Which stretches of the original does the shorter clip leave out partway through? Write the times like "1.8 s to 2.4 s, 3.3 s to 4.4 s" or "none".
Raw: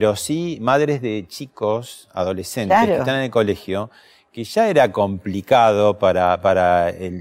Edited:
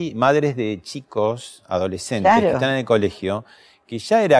none